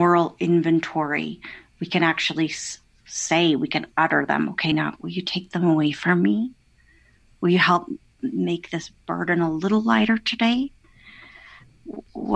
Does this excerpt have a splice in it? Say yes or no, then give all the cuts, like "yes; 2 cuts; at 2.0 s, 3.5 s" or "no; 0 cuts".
no; 0 cuts